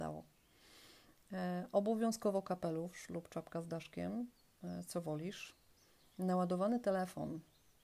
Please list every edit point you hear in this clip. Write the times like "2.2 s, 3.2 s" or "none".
none